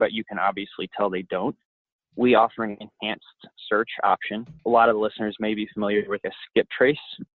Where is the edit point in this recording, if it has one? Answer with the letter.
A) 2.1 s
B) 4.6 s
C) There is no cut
B